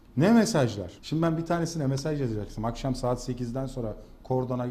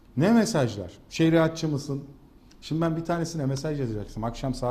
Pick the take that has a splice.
first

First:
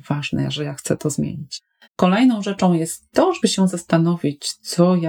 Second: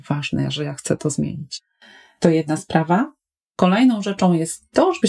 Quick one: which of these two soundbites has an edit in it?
first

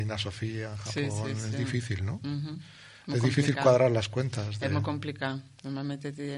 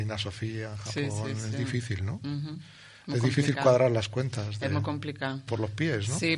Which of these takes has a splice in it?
second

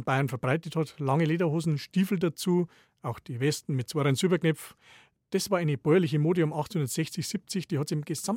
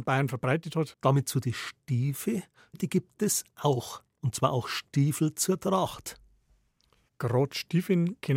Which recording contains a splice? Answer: second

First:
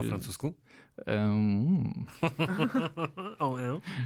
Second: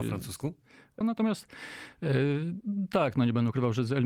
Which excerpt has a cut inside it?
second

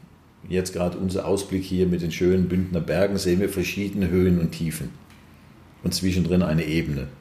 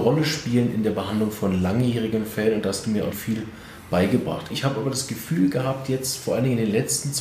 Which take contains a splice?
second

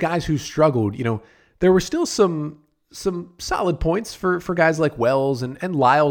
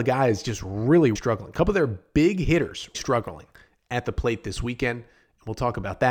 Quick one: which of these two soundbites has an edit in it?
second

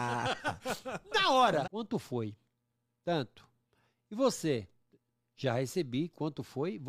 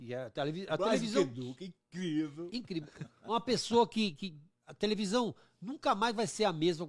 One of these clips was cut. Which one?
first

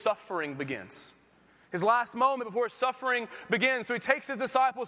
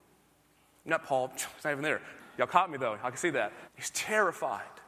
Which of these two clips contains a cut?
second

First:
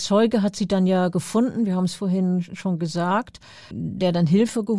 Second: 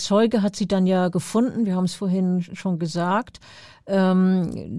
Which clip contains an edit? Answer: first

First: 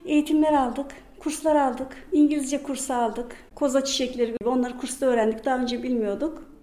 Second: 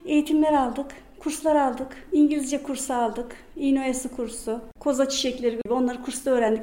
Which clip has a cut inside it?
first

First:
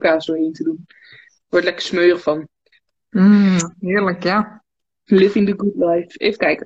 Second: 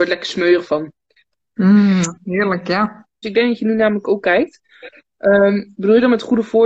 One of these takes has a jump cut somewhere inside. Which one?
second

